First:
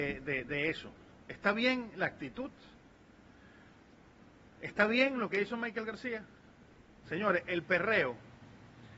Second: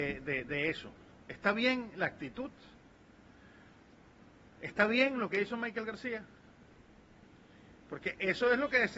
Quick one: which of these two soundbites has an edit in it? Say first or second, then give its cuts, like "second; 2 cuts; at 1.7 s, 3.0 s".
first; 1 cut; at 7.0 s